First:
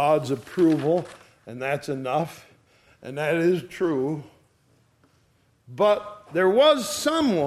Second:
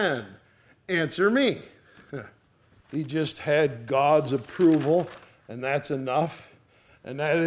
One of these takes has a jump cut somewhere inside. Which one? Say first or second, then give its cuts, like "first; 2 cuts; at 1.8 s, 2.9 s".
second; 1 cut; at 2.8 s